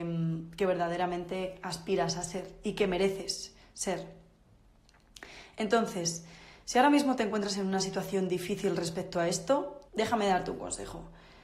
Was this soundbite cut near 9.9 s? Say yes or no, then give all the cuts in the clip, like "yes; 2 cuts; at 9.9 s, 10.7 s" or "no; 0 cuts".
yes; 1 cut; at 9.9 s